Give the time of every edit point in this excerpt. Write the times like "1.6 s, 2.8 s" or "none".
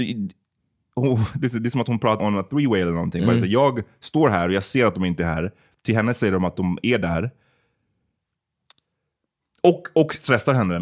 2.2 s